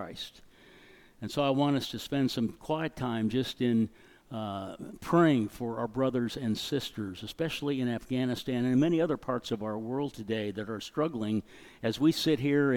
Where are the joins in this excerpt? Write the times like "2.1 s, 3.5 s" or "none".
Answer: none